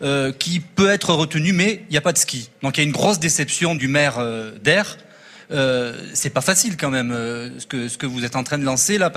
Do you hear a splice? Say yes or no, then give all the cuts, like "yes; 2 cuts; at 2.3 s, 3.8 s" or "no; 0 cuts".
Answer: yes; 1 cut; at 3.8 s